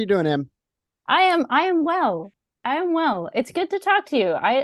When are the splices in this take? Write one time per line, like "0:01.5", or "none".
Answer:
none